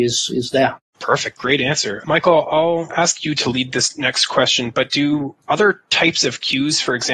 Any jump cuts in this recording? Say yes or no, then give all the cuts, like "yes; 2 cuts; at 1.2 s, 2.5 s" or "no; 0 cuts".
no; 0 cuts